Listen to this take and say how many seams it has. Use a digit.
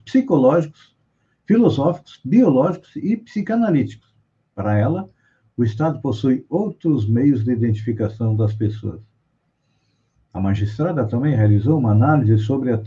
0